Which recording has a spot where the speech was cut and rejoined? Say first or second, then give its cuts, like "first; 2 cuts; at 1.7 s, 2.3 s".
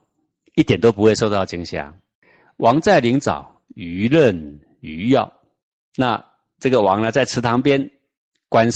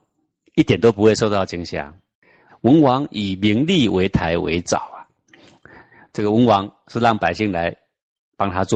second; 1 cut; at 2.5 s